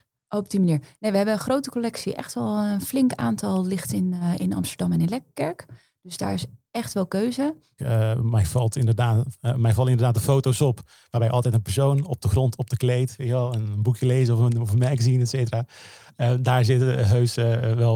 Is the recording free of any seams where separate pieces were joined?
no; 1 cut; at 7.8 s

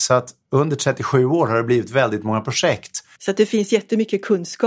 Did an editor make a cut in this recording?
yes; 1 cut; at 3.2 s

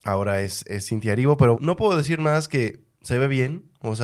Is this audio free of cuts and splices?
no; 1 cut; at 1.6 s

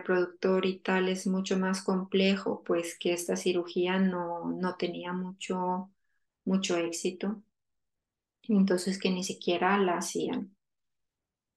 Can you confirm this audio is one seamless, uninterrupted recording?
yes; 0 cuts

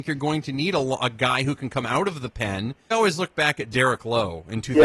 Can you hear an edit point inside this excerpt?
yes; 1 cut; at 2.9 s

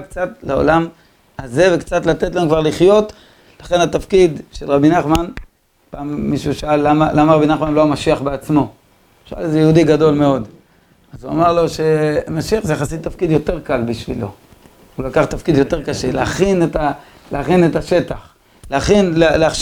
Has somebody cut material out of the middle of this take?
no; 0 cuts

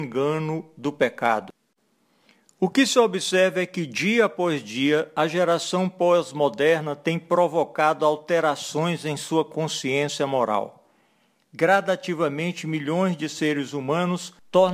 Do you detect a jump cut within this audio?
no; 0 cuts

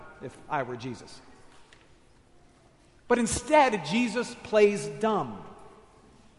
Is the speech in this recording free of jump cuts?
yes; 0 cuts

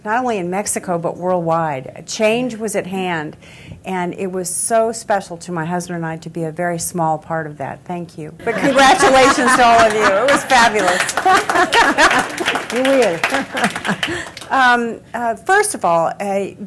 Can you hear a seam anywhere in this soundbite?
yes; 1 cut; at 8.4 s

